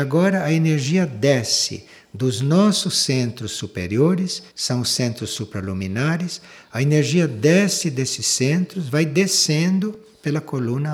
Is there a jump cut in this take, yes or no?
yes